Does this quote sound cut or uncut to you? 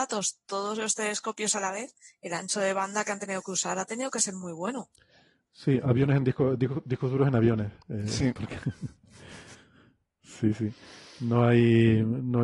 uncut